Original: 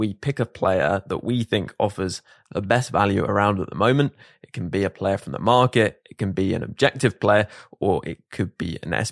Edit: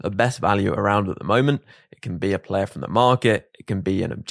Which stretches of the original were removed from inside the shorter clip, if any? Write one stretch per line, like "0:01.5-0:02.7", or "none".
none